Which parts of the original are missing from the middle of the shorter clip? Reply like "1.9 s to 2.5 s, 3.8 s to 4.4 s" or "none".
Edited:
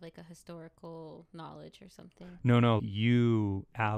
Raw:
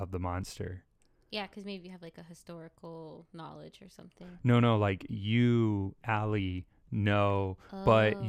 4.8 s to 5.1 s